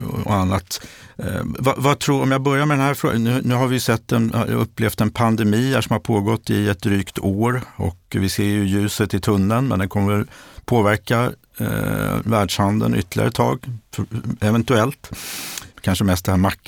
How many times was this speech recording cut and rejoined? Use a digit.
1